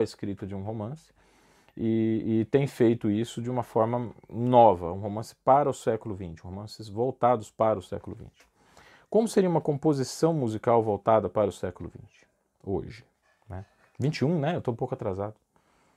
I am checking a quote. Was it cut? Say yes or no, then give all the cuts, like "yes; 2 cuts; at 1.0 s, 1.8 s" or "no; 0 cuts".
no; 0 cuts